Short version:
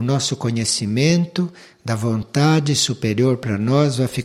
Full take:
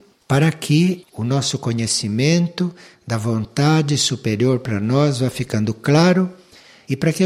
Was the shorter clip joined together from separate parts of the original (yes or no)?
no